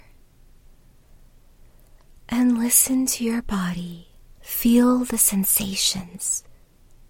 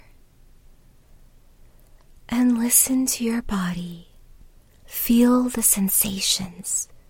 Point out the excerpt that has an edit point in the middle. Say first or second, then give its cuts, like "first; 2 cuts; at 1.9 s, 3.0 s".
first; 1 cut; at 4.3 s